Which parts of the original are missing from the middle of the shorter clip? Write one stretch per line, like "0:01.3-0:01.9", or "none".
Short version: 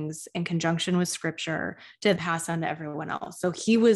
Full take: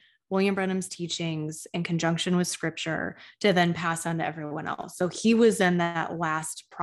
0:03.5-0:03.7